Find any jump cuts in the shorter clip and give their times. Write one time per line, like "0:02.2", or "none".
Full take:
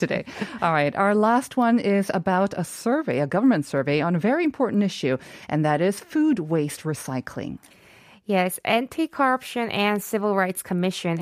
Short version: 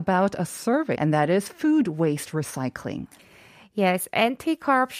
0:00.9